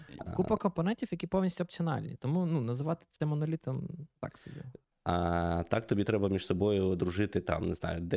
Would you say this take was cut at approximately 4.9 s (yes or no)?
yes